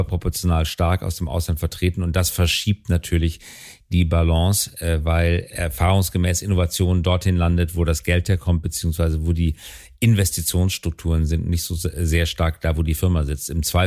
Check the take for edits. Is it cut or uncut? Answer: uncut